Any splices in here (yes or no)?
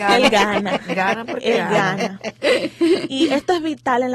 no